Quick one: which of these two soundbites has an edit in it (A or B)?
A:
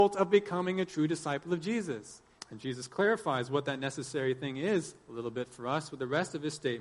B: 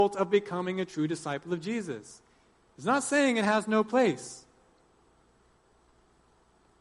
A